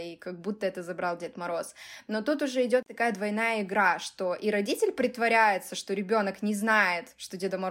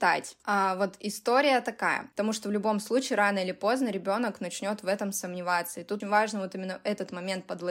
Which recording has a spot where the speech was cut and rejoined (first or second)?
second